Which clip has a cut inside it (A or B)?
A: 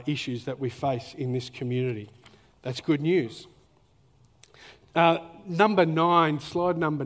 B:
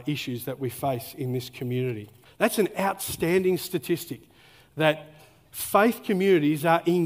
B